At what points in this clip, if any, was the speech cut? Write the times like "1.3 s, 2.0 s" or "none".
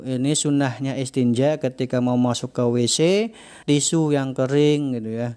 3.6 s